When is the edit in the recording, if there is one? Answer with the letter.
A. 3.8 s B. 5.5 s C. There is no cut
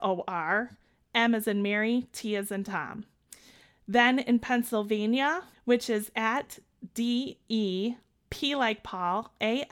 B